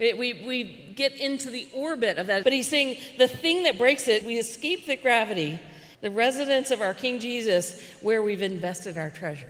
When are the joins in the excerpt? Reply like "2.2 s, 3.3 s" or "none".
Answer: 2.4 s, 4.2 s, 5.9 s